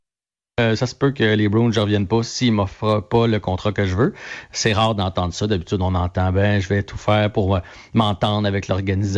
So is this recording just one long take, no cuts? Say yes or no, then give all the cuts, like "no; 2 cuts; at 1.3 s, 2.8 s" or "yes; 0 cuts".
yes; 0 cuts